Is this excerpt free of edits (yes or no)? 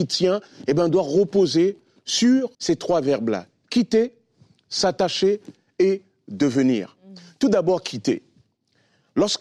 no